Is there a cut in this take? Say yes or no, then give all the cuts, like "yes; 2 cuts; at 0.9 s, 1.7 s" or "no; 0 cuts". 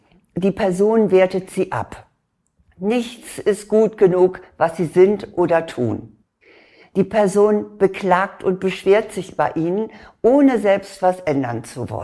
no; 0 cuts